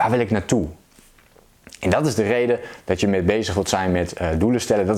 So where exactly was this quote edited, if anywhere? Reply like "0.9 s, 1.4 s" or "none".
none